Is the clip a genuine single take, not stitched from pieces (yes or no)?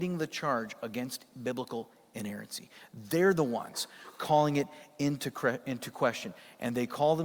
yes